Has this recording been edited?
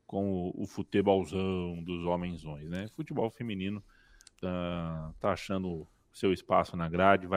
no; 0 cuts

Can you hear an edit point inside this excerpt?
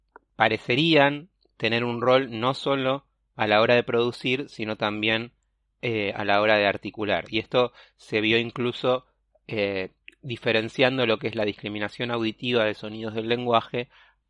no; 0 cuts

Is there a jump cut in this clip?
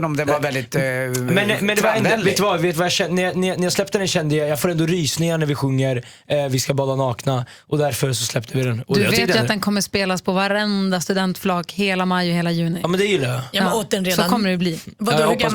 no; 0 cuts

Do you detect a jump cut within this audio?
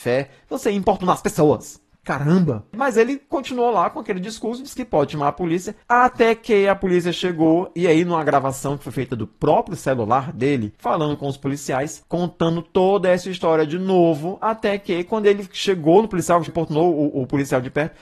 yes; 2 cuts; at 10.8 s, 16.5 s

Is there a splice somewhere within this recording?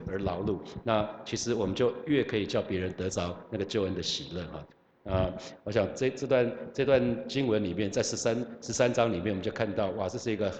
no; 0 cuts

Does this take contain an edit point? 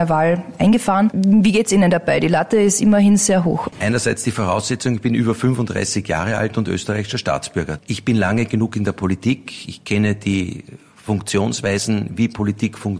yes; 2 cuts; at 3.7 s, 7.8 s

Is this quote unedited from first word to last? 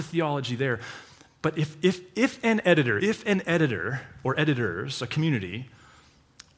no; 1 cut; at 3.0 s

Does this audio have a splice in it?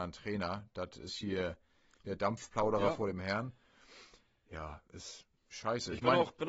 no; 0 cuts

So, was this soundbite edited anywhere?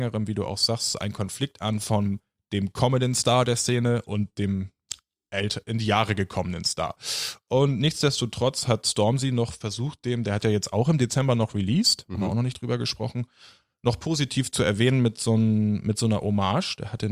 no; 0 cuts

